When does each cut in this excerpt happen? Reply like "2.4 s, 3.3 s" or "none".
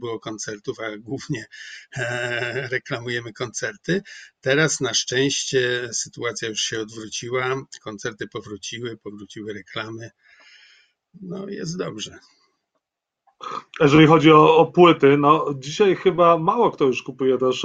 none